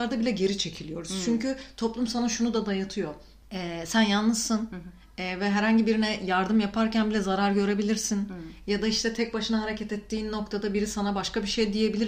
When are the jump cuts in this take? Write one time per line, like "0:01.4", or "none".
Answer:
none